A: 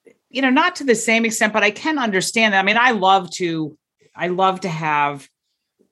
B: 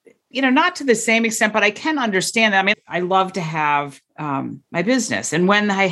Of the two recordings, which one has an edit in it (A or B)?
B